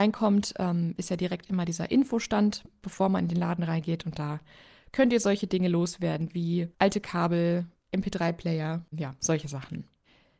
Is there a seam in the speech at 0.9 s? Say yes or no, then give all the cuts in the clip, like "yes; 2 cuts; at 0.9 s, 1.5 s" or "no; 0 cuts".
no; 2 cuts; at 6.7 s, 8.9 s